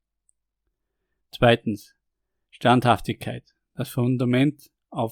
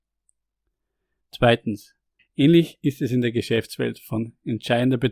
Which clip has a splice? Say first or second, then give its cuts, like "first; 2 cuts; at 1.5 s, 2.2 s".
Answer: second; 1 cut; at 2.2 s